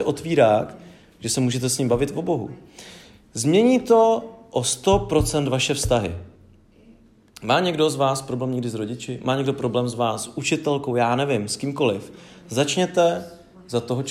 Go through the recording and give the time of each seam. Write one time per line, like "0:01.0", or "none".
none